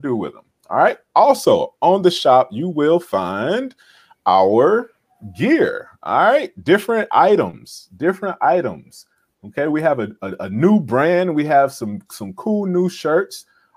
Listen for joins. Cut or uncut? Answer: uncut